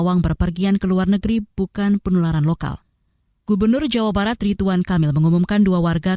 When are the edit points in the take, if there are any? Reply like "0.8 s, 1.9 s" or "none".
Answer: 3.3 s